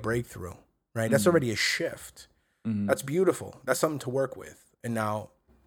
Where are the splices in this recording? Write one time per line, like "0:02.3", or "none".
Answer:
none